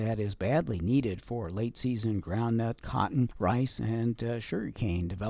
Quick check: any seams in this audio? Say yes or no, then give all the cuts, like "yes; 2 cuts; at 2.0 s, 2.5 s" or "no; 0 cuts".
no; 0 cuts